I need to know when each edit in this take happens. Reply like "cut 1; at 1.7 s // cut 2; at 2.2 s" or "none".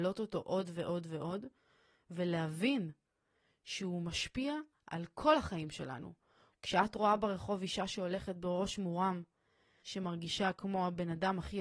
cut 1; at 6.5 s // cut 2; at 9.8 s